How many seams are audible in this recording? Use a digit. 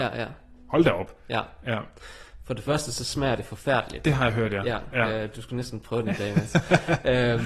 0